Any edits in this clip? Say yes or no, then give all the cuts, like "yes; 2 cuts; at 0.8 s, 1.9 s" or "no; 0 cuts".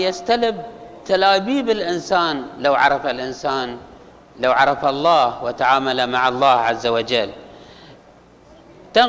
no; 0 cuts